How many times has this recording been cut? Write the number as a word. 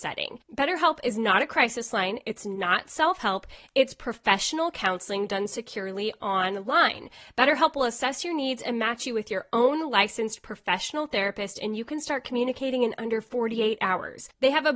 zero